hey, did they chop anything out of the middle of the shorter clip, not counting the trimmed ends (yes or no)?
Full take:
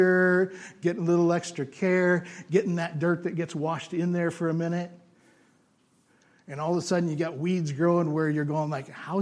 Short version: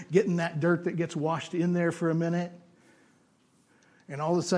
no